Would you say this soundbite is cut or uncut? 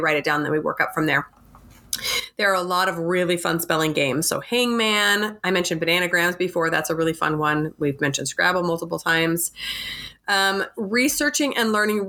uncut